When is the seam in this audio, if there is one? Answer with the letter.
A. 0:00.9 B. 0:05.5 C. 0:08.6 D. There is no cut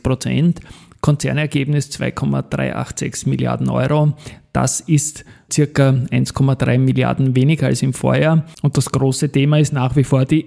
B